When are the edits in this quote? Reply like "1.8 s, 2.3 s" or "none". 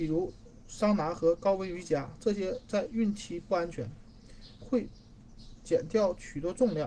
4.6 s